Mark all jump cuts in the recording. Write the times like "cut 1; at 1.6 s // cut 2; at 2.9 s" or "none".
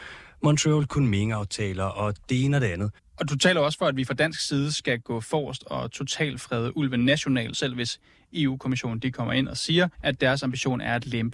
cut 1; at 3.0 s // cut 2; at 7.5 s // cut 3; at 9.9 s